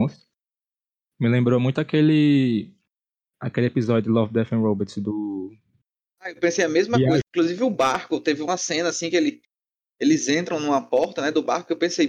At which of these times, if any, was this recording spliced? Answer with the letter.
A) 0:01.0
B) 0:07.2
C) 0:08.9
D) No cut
B